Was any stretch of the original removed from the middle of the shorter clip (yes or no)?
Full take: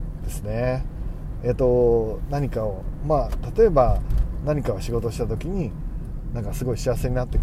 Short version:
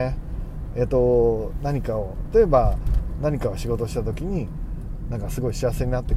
yes